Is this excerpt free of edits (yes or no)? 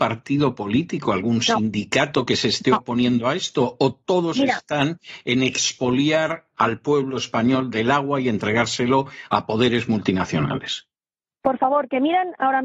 yes